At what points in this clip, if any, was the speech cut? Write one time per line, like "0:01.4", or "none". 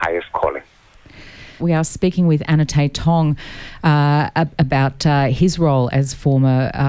0:01.6